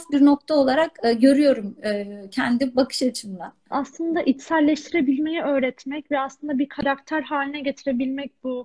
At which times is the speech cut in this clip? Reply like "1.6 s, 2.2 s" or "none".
3.7 s